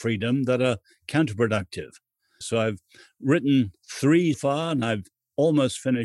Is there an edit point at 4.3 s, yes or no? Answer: yes